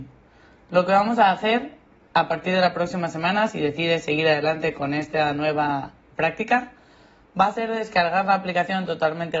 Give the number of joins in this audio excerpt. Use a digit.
0